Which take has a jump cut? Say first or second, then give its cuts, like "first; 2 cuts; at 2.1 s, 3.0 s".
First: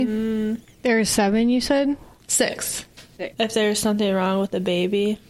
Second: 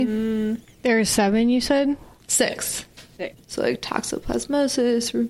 second; 1 cut; at 3.4 s